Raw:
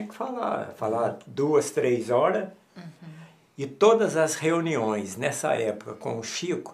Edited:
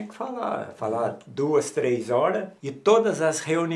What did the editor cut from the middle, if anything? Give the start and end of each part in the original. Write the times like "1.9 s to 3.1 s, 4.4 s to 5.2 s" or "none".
2.6 s to 3.5 s

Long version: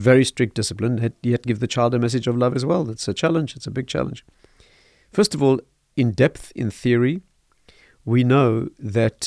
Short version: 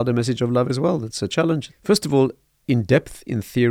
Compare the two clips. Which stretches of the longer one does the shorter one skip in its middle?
3.5 s to 5.0 s

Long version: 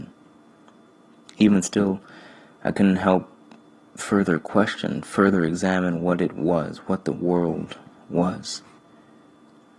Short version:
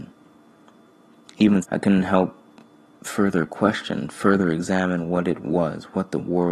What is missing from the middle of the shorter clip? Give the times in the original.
1.6 s to 2.6 s

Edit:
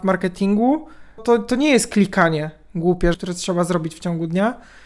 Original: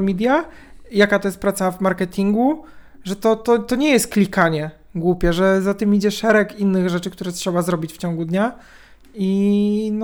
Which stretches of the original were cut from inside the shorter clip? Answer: 2.9 s to 3.4 s, 5.3 s to 7.1 s

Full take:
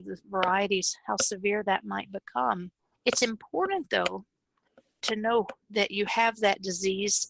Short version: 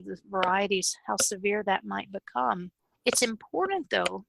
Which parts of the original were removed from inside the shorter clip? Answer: none

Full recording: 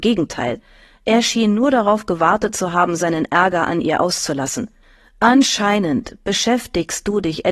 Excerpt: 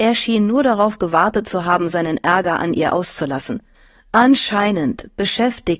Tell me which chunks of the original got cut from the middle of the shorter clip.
none

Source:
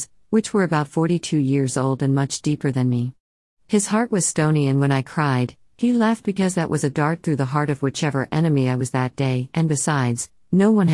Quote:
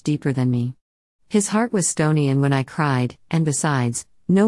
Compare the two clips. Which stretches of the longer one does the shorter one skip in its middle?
5.7 s to 9.5 s

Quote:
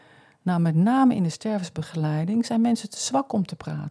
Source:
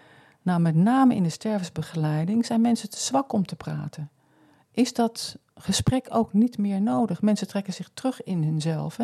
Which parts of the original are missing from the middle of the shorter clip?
none

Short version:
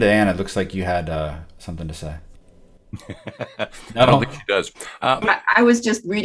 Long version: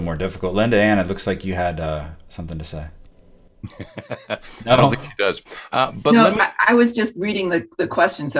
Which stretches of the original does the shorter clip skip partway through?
5.9 s to 6.3 s

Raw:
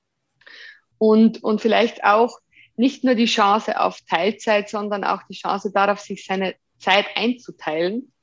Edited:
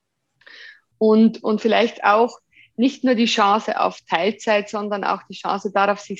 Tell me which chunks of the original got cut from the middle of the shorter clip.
none

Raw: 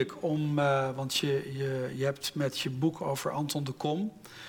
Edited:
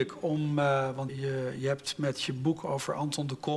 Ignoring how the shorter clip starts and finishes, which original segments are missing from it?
1.1 s to 1.5 s

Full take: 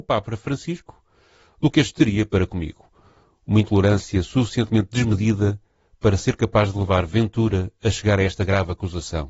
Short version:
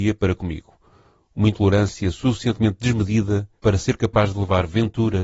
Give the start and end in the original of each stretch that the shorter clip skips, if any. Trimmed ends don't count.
5.7 s to 6.0 s

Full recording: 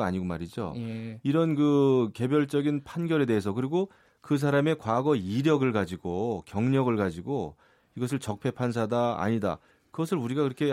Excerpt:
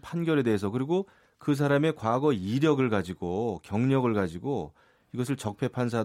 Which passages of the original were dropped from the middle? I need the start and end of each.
none

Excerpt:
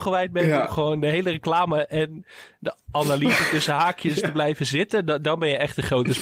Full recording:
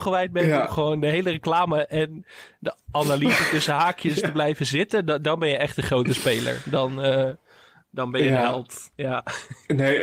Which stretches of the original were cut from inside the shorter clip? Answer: none

